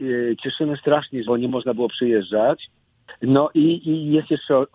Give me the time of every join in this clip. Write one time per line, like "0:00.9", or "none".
0:01.2